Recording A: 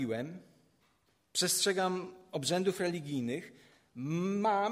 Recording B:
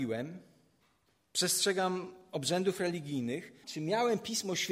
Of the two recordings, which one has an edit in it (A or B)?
B